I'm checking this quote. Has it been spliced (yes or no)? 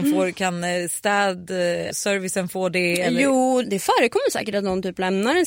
yes